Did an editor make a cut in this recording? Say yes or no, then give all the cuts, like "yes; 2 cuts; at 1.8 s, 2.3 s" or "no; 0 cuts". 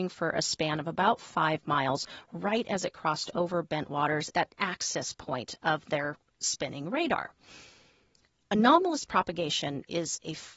yes; 1 cut; at 4.3 s